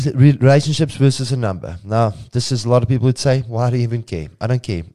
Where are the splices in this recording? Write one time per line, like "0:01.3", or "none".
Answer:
none